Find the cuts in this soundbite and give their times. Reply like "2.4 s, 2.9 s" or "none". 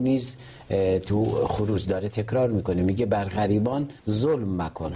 4.0 s

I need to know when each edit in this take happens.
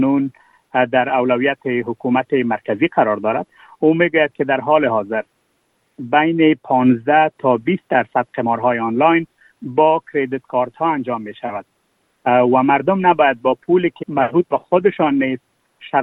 14.0 s

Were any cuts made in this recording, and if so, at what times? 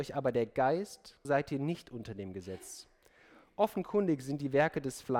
1.2 s

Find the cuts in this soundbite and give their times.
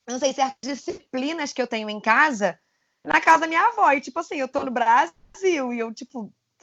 none

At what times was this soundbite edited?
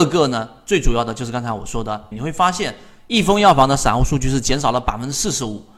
2.1 s

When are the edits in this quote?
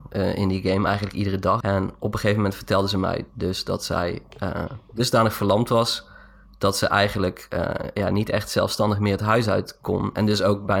1.6 s

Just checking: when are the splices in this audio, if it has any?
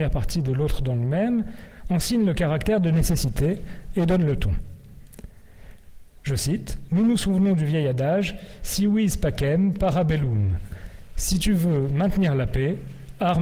none

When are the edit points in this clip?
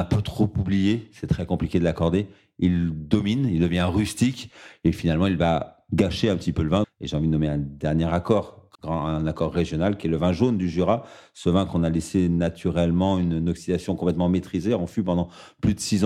6.8 s, 8.7 s

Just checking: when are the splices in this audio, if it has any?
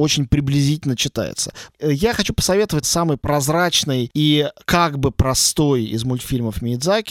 1.7 s, 2.8 s

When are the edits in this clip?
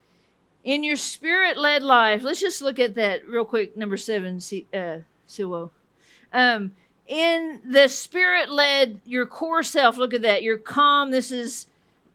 none

